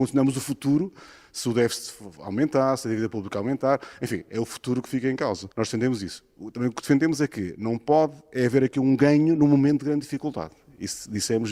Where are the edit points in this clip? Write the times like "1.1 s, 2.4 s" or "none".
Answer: 5.5 s